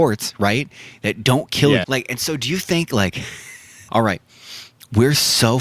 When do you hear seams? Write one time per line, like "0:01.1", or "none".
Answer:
0:01.8
0:03.9

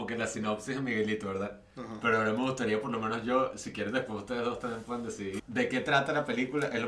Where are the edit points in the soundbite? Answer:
0:05.4

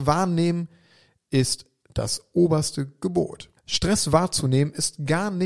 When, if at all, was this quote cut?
0:03.6

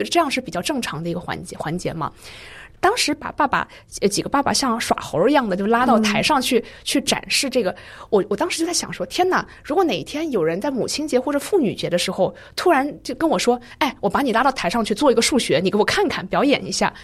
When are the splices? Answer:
none

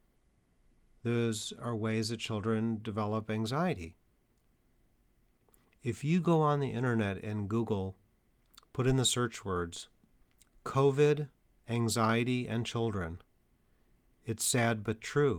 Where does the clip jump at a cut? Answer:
none

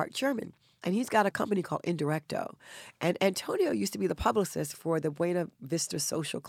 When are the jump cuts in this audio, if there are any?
none

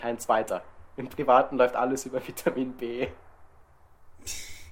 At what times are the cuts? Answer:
0:01.0

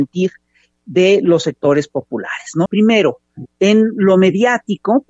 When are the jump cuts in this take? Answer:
0:02.7

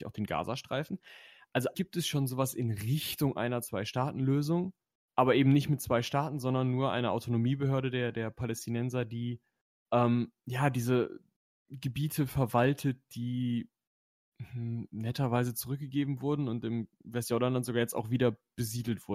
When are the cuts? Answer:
0:01.7

